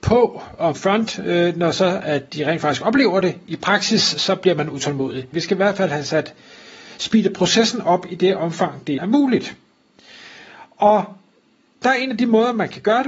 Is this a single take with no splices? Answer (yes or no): no